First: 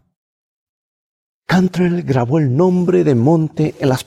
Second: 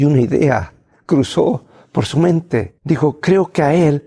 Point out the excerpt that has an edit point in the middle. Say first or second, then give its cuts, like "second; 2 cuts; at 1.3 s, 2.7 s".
second; 1 cut; at 2.8 s